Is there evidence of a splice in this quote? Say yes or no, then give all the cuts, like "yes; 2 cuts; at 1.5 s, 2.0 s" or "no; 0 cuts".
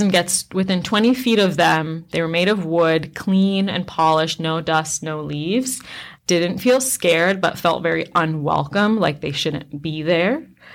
yes; 1 cut; at 6.2 s